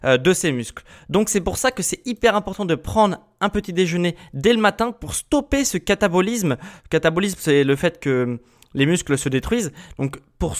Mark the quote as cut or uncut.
uncut